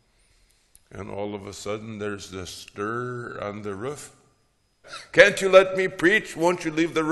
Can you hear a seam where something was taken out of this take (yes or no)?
yes